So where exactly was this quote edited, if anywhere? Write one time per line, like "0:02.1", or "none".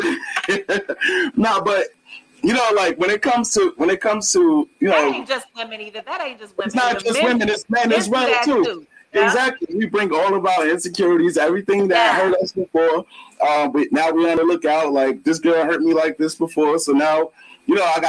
none